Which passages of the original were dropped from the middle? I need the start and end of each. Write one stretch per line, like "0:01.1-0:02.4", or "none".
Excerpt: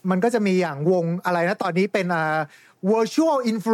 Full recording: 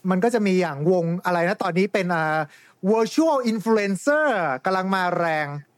none